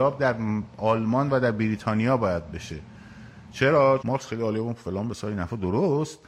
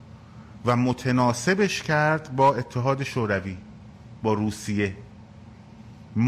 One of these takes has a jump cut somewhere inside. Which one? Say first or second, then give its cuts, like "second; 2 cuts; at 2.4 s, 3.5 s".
first; 1 cut; at 4.0 s